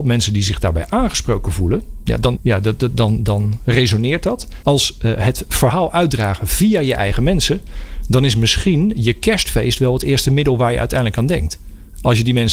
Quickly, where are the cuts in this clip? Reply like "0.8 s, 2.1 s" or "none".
2.4 s, 4.6 s